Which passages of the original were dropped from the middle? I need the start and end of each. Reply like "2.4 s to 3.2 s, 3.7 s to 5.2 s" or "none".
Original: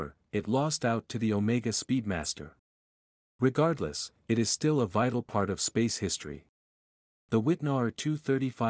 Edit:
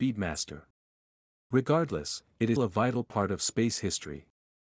4.4 s to 4.7 s